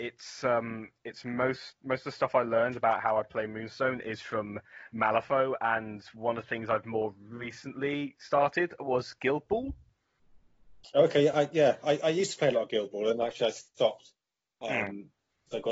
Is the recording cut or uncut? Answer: uncut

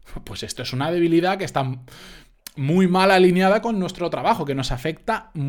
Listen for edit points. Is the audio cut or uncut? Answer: uncut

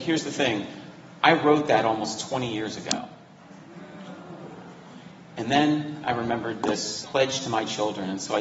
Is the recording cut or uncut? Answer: cut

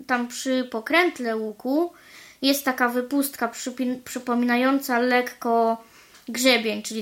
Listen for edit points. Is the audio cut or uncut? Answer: uncut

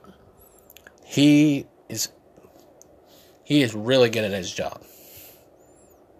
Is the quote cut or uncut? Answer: cut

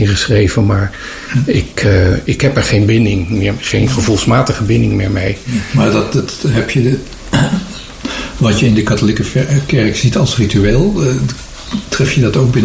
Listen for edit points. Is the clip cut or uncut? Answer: uncut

